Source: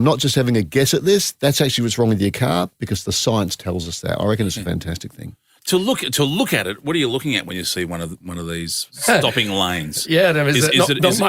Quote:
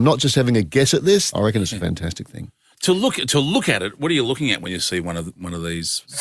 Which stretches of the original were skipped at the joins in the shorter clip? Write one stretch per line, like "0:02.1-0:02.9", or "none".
0:01.3-0:04.2